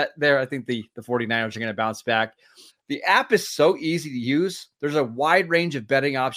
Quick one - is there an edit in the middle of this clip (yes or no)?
yes